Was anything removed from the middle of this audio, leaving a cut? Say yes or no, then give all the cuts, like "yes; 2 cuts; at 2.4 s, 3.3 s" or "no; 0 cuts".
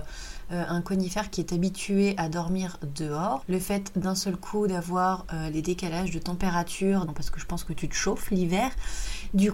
yes; 2 cuts; at 3.4 s, 7.1 s